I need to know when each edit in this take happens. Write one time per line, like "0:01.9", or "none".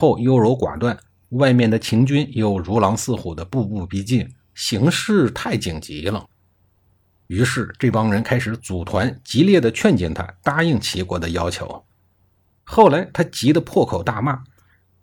0:12.5

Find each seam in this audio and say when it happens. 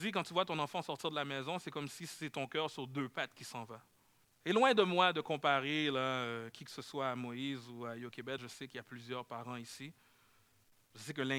0:04.2
0:08.4

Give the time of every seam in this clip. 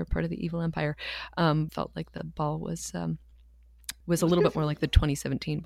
0:01.7
0:04.0

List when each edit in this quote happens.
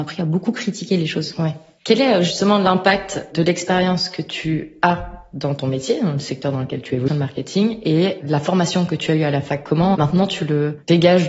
0:07.1
0:09.9

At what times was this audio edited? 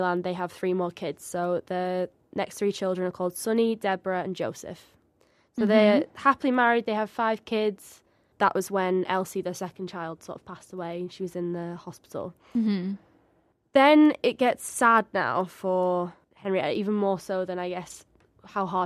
0:08.3
0:16.2

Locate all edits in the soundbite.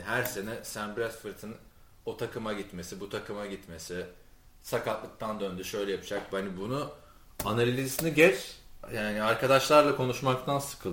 none

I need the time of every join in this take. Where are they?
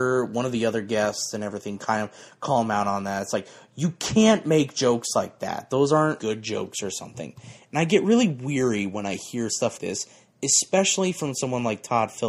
0:06.2
0:09.8

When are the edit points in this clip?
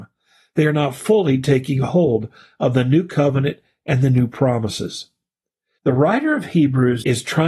0:05.8

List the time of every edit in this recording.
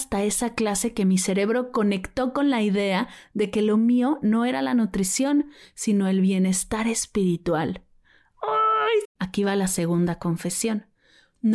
0:09.0

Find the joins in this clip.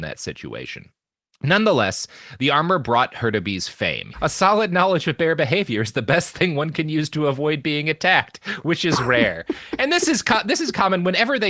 0:04.1

